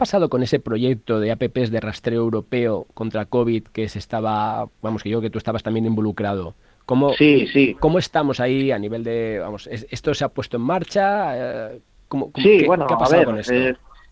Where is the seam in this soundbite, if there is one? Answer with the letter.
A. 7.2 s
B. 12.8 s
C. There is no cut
C